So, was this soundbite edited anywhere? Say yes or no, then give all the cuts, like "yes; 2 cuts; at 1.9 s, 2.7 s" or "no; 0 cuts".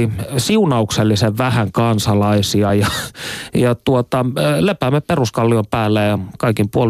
no; 0 cuts